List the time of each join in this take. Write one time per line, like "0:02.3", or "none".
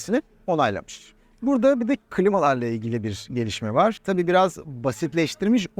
0:04.0